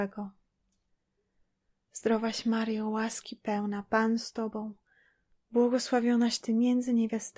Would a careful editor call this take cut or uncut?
uncut